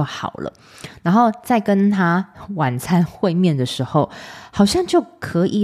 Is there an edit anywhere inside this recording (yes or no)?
no